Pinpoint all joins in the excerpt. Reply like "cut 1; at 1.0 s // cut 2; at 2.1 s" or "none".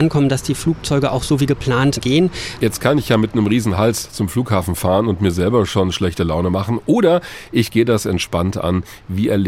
cut 1; at 2.6 s